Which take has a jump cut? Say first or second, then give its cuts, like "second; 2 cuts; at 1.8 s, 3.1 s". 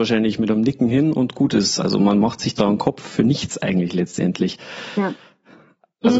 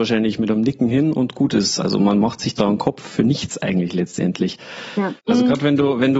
second; 1 cut; at 5.2 s